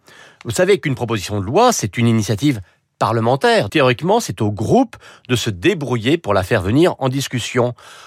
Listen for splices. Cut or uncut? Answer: cut